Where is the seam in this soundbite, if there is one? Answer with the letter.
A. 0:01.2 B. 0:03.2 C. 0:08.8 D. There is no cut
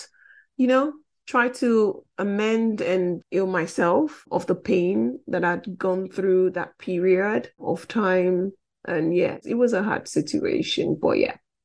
B